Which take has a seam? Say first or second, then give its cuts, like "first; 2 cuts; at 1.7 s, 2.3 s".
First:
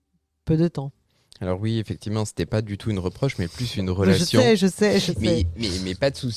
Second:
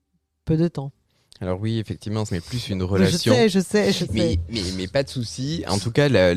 second; 1 cut; at 2.3 s